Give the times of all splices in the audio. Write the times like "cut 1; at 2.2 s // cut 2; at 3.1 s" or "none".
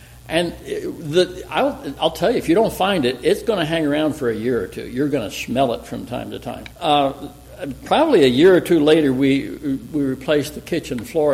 cut 1; at 6.7 s